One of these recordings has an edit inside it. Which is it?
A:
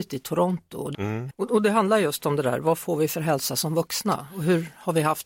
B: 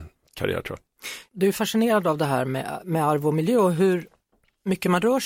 A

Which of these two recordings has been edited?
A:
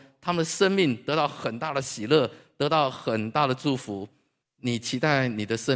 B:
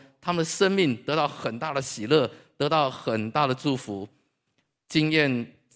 A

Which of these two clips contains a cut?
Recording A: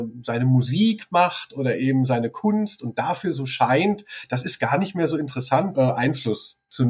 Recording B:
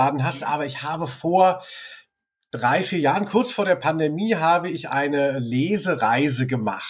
A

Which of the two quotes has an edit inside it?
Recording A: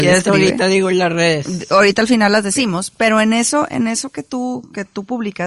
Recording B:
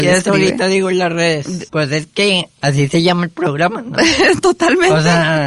B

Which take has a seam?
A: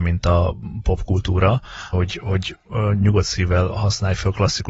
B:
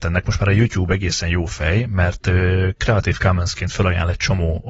A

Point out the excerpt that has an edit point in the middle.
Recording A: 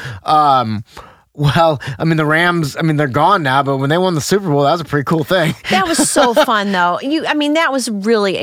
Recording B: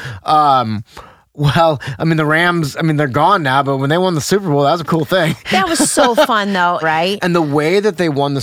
B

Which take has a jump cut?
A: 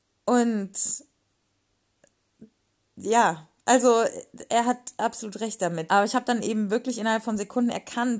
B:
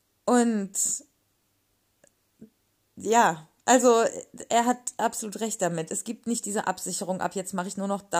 A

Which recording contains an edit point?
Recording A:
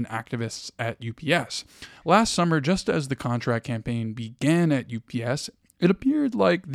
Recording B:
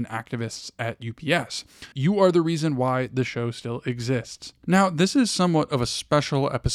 B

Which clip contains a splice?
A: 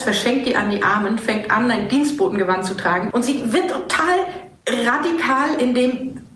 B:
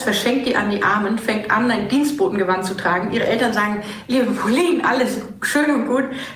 A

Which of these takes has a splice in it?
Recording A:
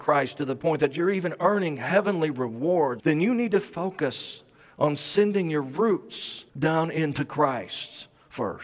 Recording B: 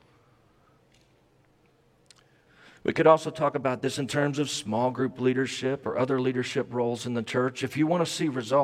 A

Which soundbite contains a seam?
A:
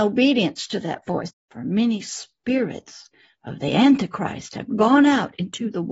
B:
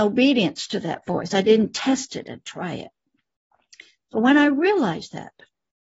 A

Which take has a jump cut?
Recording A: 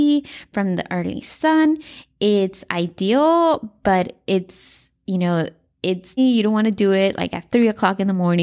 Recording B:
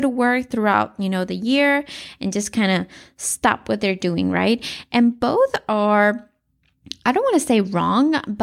A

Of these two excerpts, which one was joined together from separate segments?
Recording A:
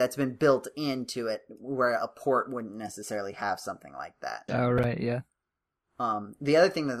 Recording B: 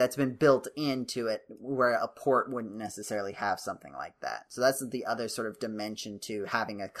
A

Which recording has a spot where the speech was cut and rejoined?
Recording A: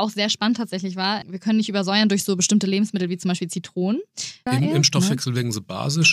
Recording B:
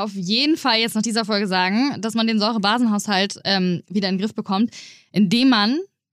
A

